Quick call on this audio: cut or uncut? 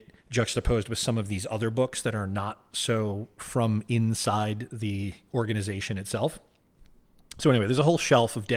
uncut